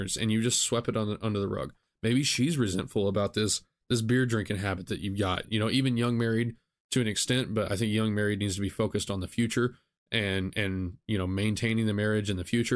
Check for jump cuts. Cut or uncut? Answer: cut